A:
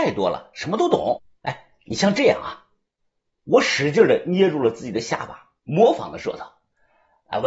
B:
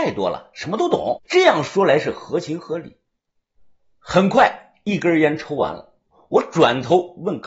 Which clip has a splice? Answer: B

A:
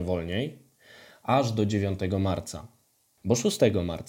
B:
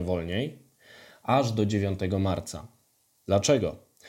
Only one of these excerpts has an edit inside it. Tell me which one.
A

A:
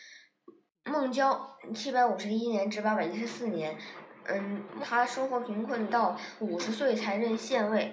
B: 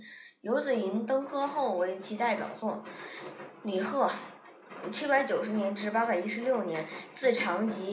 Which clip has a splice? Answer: A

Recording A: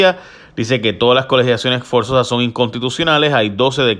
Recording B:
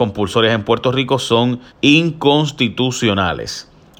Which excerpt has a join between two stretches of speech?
B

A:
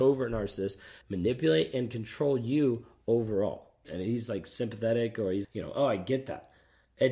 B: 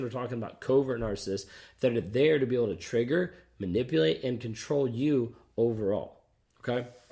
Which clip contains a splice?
A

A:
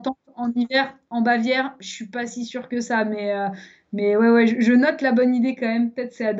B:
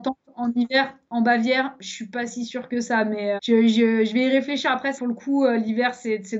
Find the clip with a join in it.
B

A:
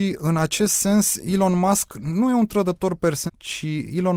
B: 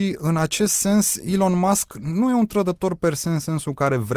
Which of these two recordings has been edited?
A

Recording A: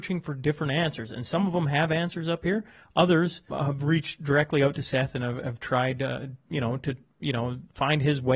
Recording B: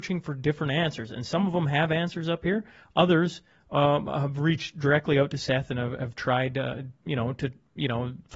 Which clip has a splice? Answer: A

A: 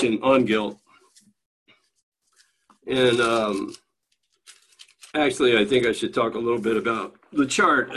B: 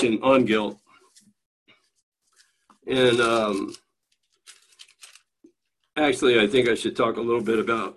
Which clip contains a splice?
A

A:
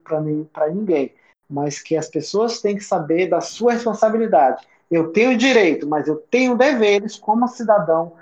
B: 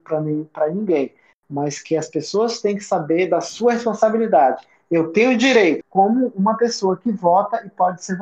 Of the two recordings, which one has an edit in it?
B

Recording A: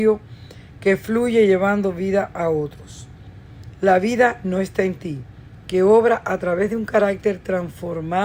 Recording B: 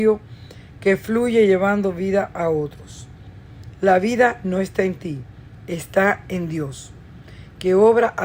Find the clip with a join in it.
A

